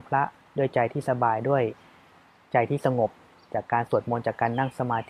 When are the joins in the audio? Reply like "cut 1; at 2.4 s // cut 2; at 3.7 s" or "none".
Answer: none